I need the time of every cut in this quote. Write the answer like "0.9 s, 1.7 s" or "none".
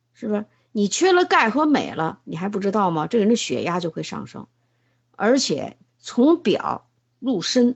5.9 s